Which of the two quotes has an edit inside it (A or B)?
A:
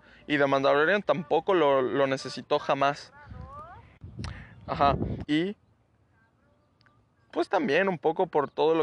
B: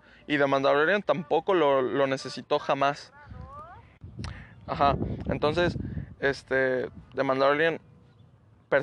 A